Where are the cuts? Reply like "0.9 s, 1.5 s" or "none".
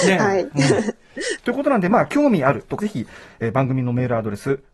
1.4 s, 2.8 s